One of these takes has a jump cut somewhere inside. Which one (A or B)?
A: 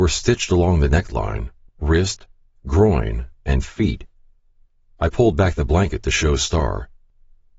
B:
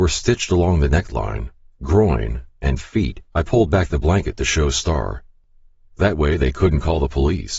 B